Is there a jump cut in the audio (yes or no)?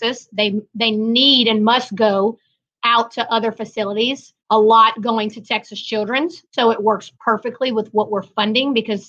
yes